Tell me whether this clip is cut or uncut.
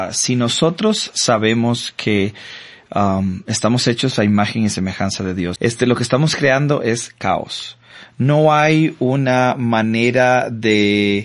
cut